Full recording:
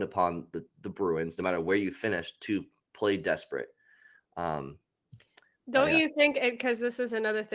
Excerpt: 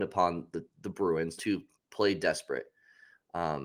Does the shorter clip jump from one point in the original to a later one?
yes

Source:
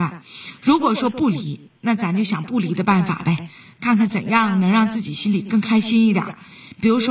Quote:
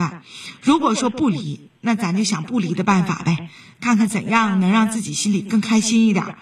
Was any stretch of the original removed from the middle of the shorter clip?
no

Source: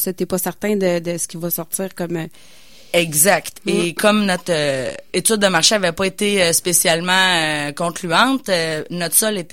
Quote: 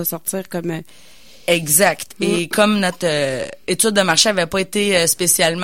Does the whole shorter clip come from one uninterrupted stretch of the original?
yes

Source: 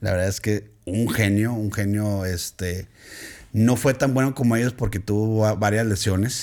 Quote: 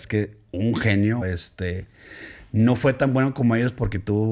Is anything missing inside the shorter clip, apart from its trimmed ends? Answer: yes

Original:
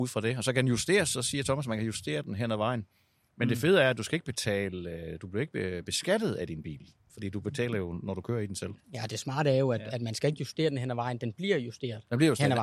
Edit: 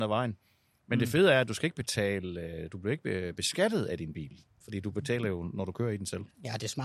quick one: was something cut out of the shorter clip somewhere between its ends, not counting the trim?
no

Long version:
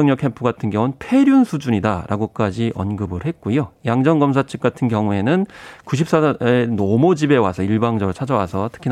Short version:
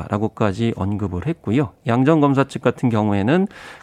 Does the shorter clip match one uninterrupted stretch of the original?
yes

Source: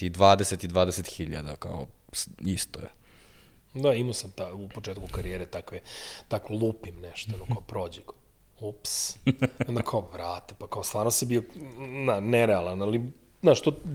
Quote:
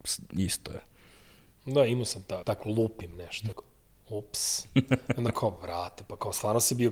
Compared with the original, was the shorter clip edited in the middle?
yes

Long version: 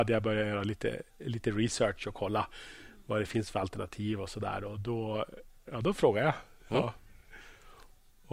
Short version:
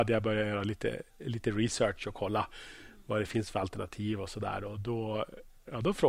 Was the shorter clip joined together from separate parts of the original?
no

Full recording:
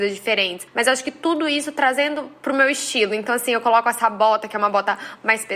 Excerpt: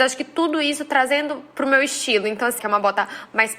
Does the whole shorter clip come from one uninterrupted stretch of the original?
no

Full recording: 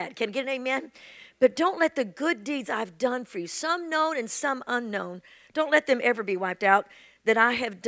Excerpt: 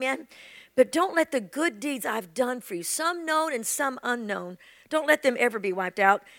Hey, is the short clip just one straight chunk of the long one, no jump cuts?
yes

